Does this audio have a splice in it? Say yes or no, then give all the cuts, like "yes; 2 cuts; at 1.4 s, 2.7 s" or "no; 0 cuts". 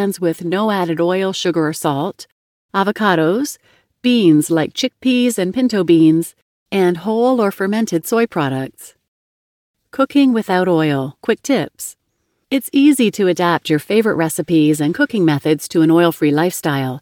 no; 0 cuts